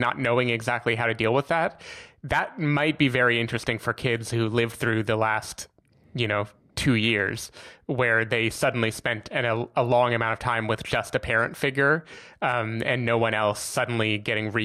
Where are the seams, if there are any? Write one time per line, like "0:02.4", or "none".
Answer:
none